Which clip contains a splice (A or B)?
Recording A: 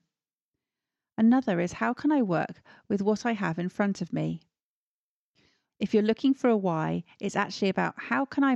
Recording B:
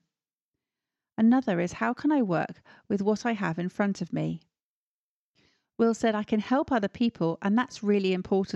A